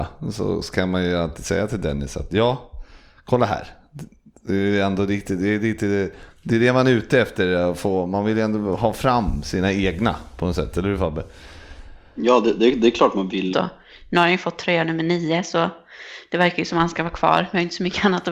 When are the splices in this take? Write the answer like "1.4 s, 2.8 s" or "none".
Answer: 13.5 s